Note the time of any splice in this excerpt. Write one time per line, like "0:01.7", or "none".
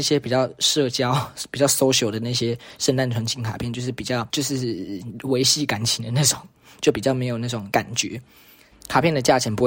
0:08.7